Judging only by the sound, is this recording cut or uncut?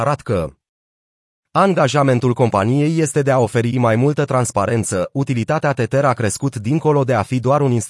uncut